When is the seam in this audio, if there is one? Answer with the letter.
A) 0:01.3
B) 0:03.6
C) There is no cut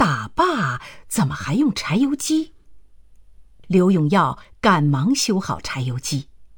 B